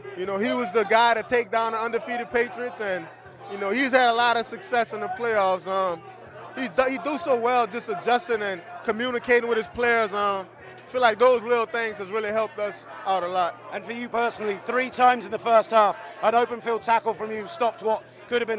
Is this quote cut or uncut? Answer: uncut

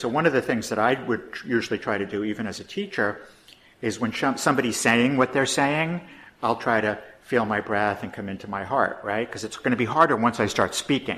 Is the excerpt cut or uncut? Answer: uncut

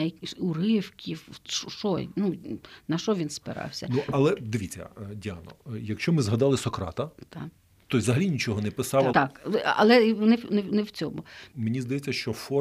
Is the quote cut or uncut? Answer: cut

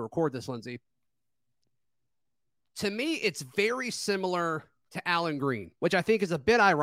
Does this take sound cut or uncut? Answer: uncut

